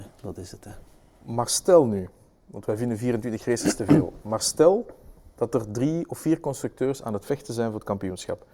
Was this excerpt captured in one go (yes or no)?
yes